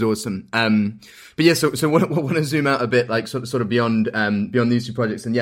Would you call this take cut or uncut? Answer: uncut